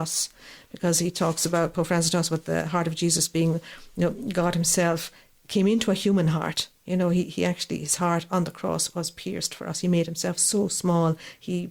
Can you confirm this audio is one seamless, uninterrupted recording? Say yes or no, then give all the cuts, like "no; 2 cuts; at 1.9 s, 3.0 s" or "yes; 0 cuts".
no; 1 cut; at 6.8 s